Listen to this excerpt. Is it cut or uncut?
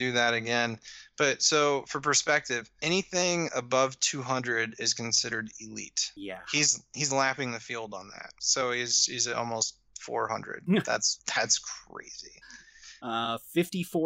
uncut